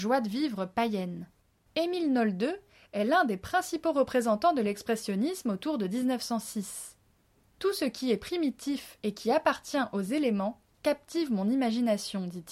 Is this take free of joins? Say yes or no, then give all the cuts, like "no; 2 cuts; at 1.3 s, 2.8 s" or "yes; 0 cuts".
no; 1 cut; at 1.7 s